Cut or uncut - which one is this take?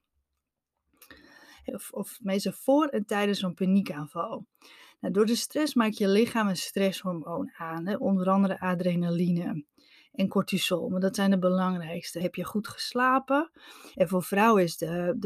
cut